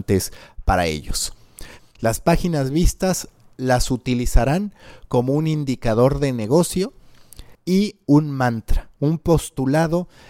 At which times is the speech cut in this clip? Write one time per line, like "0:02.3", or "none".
0:01.8
0:07.5